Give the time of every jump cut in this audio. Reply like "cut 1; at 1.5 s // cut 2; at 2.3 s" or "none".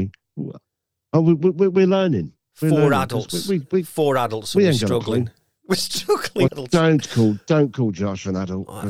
cut 1; at 6.5 s